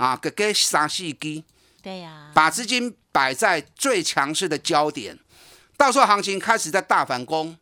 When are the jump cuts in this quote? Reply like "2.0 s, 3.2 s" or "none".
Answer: 1.8 s